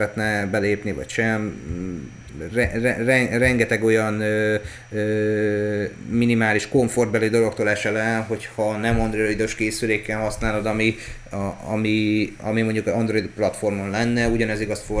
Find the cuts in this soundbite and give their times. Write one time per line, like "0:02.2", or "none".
none